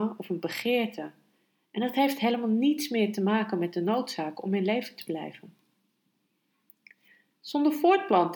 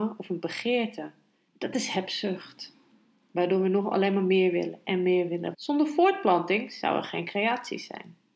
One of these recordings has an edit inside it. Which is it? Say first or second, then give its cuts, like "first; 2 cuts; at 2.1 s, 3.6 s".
second; 2 cuts; at 1.5 s, 5.5 s